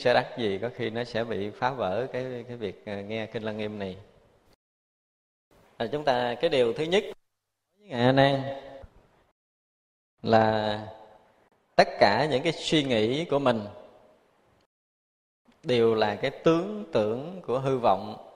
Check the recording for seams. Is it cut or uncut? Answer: uncut